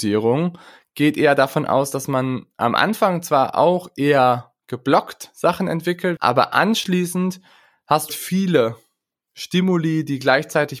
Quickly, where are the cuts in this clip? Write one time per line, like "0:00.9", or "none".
0:06.2
0:08.1